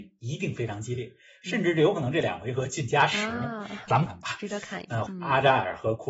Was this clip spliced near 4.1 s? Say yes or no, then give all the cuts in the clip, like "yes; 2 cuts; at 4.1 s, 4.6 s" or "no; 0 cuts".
yes; 2 cuts; at 4.1 s, 5.1 s